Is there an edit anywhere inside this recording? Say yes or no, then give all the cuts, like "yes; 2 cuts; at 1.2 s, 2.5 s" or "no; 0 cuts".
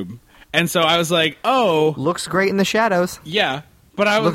no; 0 cuts